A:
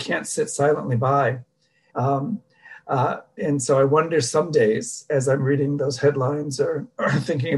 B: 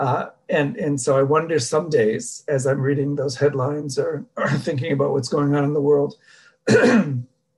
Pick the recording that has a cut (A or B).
A